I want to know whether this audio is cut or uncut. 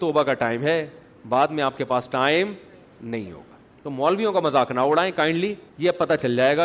cut